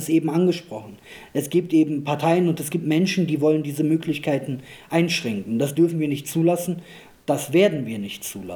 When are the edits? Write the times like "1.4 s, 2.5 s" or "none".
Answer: none